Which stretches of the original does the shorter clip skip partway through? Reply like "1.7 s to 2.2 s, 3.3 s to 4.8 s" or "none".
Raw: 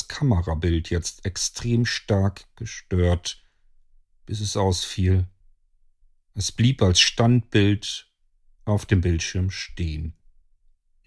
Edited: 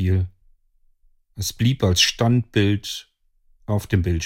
none

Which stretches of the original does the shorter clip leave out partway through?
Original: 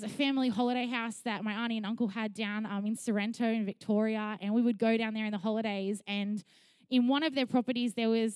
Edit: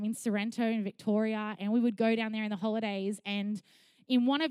none

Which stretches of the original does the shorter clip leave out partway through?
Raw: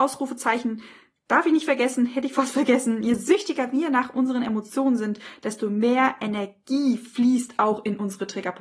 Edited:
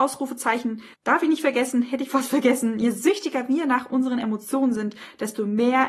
0.9 s to 1.2 s

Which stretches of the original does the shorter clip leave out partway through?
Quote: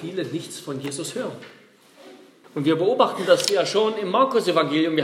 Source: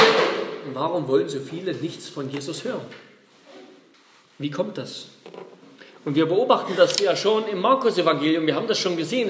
3.9 s to 5.9 s

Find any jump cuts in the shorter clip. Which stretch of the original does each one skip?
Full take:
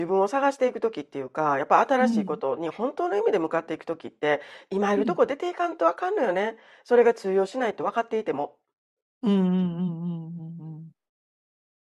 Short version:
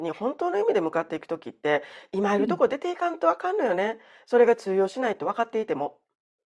none

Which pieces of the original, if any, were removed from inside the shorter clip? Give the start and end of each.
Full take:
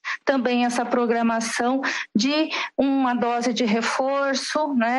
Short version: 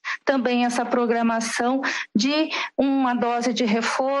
none

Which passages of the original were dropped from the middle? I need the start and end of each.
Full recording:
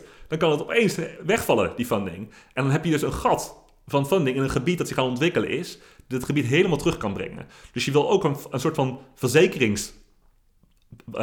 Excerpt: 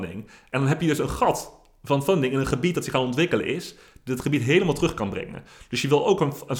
none

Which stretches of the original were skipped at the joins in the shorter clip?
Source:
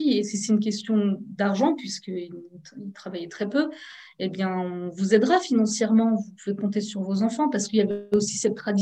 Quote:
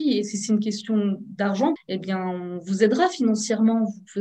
1.8 s to 4.1 s

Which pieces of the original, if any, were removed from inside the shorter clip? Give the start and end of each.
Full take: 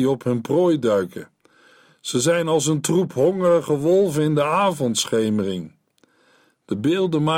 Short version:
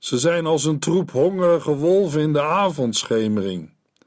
none

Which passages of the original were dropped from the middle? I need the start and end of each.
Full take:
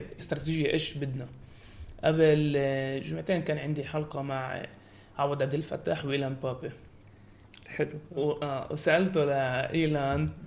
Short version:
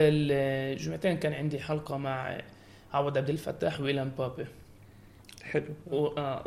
none

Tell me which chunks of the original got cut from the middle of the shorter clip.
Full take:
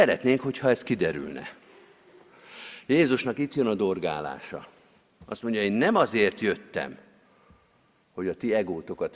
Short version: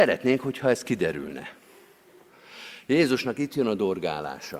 none

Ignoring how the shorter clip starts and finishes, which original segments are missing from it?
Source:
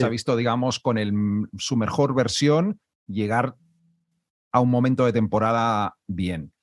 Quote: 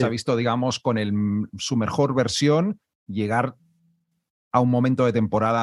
none

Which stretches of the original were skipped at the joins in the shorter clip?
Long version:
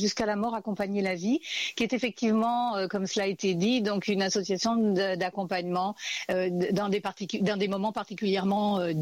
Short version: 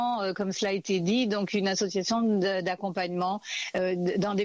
none

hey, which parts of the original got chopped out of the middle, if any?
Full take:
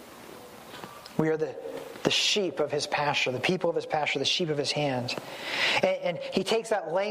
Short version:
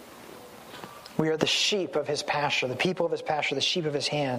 1.4 s to 2.0 s

